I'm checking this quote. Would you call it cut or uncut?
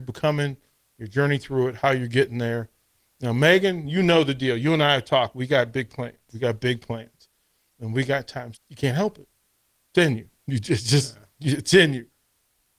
cut